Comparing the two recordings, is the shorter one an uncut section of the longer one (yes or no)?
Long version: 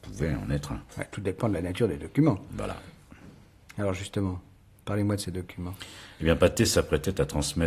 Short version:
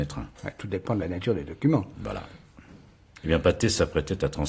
no